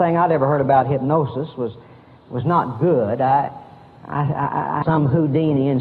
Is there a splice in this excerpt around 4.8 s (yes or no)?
yes